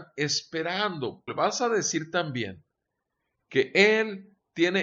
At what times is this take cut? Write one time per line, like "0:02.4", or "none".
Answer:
0:01.3